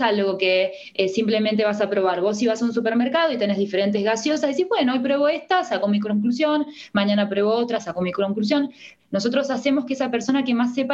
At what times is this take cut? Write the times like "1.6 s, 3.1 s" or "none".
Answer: 9.0 s

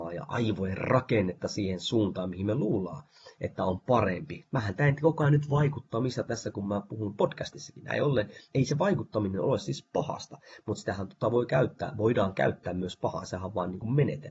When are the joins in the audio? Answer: none

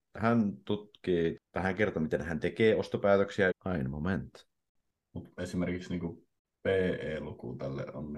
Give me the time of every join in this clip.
1.4 s, 3.5 s

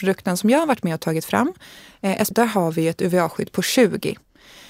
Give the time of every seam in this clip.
2.3 s

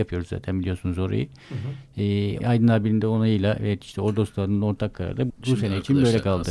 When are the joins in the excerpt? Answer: 2.4 s, 5.3 s

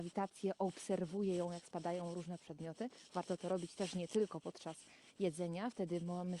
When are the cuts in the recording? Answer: none

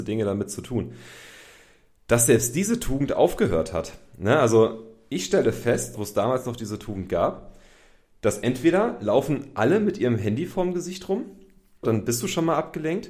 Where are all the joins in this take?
5.9 s, 11.8 s

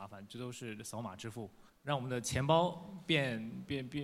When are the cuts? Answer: none

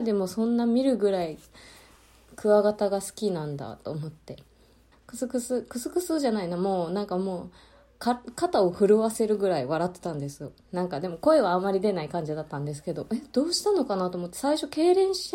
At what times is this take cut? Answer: 4.9 s

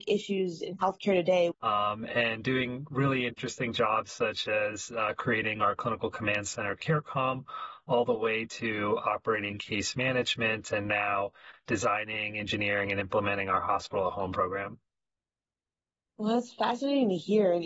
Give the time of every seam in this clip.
1.5 s

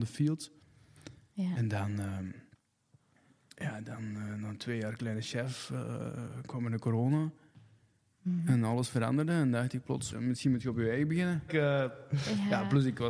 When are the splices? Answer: 10.1 s, 11.5 s

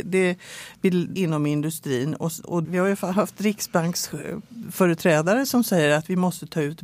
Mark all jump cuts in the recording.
1.2 s, 2.6 s

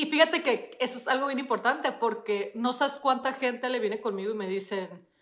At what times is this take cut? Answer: none

